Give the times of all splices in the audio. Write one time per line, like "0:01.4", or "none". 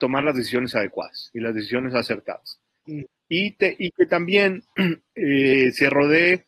0:02.8